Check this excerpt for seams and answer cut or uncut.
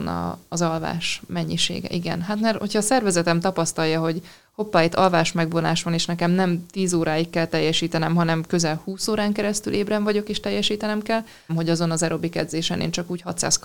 cut